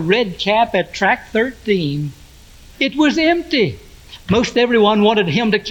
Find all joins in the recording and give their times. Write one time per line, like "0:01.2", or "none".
0:02.7
0:04.2